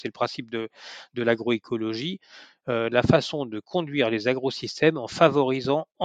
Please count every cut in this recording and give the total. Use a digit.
0